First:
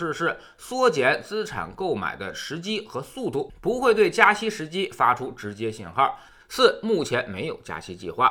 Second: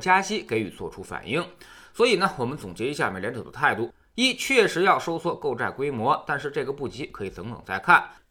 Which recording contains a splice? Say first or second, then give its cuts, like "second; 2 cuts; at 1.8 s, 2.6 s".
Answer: first; 1 cut; at 6.4 s